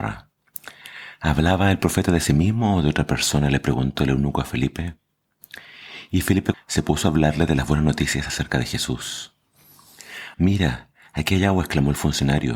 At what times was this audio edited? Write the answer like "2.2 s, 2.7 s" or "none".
6.5 s, 10.3 s